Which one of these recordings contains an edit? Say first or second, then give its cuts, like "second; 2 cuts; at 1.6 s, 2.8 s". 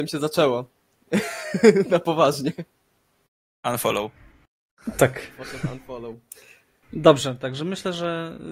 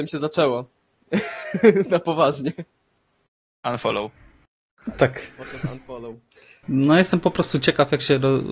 second; 1 cut; at 6.6 s